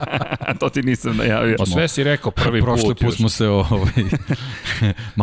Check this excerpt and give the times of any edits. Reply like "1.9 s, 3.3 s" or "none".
1.6 s